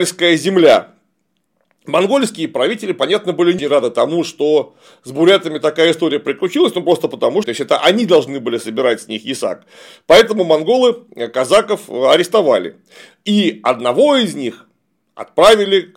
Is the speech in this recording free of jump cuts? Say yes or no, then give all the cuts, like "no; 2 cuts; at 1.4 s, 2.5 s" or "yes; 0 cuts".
no; 2 cuts; at 3.6 s, 7.4 s